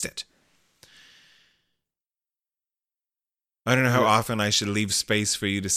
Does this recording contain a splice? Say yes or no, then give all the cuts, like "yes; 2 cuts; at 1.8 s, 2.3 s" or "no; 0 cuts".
no; 0 cuts